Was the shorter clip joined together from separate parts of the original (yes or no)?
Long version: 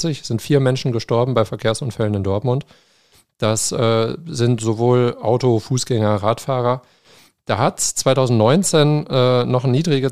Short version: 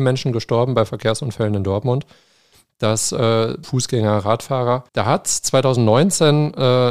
yes